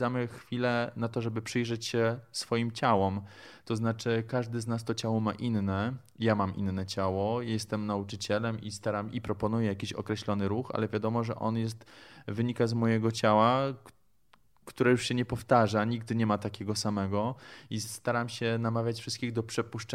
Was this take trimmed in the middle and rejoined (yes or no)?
no